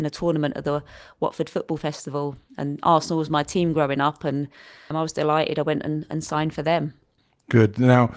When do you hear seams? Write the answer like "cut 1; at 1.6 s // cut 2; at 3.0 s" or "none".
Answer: cut 1; at 4.9 s